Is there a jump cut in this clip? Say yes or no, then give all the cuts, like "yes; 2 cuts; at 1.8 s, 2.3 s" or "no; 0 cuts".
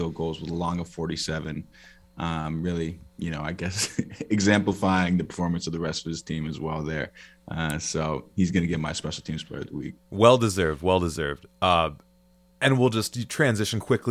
no; 0 cuts